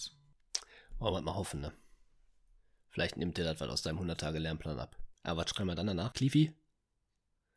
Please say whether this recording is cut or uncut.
cut